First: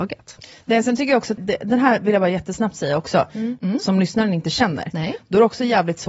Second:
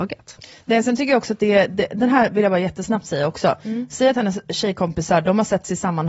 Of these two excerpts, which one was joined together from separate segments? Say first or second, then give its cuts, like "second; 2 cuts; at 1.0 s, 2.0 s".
first; 2 cuts; at 1.4 s, 3.6 s